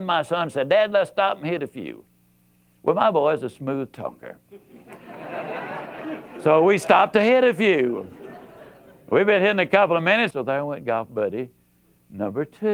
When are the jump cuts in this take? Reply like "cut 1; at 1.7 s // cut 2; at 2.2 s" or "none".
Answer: cut 1; at 10.3 s

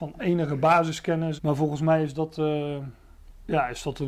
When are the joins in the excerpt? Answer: cut 1; at 1.4 s

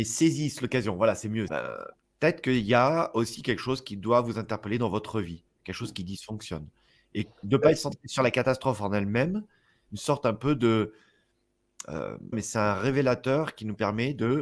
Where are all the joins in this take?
cut 1; at 1.5 s // cut 2; at 9.9 s // cut 3; at 12.3 s

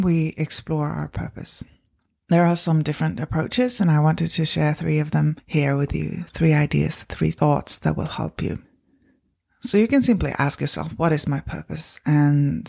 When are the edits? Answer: none

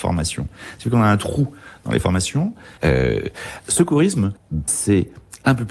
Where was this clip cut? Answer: cut 1; at 2.8 s // cut 2; at 4.7 s

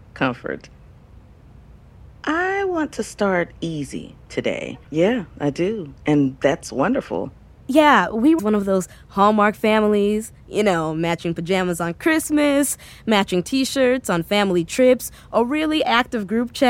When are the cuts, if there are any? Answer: cut 1; at 4.8 s // cut 2; at 8.4 s

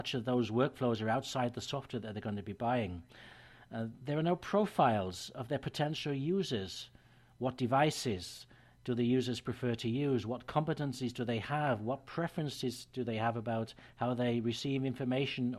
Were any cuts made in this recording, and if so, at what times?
none

